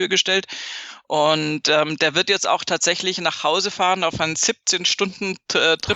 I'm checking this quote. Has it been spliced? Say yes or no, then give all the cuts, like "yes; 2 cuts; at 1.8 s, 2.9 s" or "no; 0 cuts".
no; 0 cuts